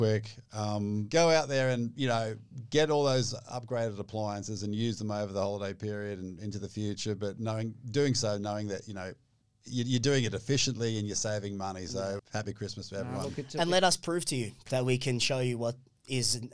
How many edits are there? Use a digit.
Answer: 1